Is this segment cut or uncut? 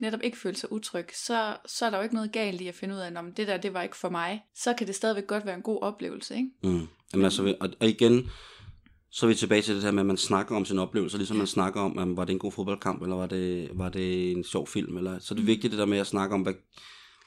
cut